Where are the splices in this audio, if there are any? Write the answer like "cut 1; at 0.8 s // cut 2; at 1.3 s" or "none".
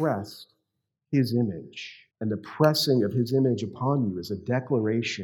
cut 1; at 2.1 s